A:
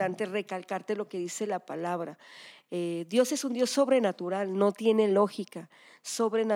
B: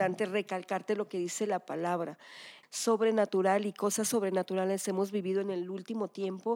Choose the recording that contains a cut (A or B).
B